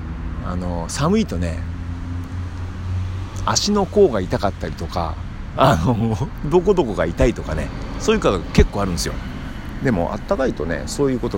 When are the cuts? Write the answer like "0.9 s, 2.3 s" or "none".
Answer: 6.4 s